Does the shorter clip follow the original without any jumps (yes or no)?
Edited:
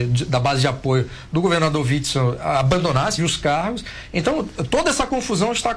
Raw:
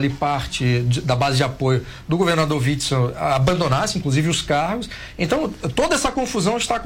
no